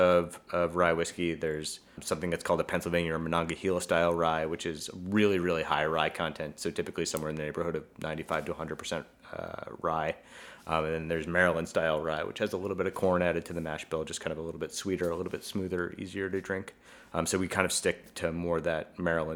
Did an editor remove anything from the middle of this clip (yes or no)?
no